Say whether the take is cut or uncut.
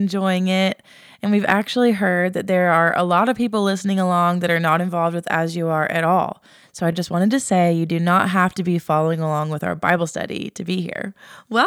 uncut